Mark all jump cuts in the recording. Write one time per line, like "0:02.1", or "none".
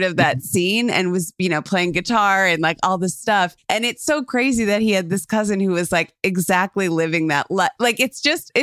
none